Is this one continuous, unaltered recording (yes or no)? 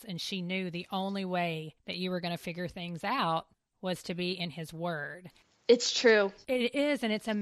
yes